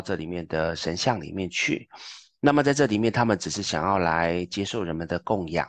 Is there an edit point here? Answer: no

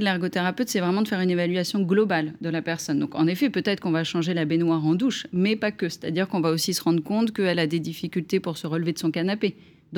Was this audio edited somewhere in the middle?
no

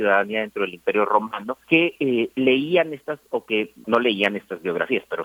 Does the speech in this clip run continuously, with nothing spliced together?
no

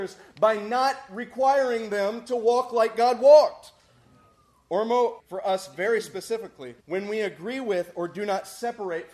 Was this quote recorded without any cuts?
no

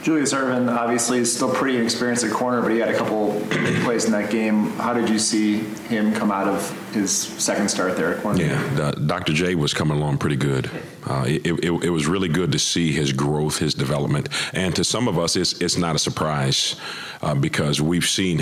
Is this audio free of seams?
yes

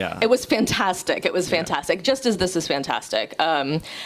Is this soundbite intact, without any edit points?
yes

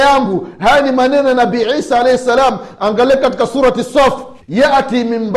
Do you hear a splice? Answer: yes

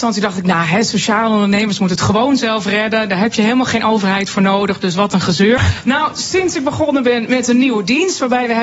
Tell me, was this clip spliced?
yes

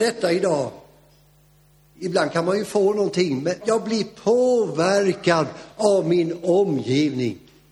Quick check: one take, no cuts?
no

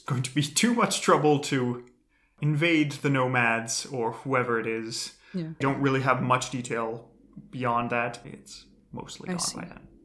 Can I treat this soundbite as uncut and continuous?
no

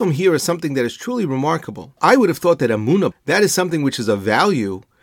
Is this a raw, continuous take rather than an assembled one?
no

